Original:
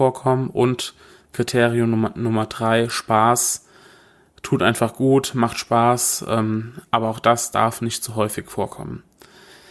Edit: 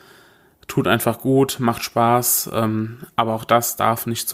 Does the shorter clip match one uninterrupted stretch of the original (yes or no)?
yes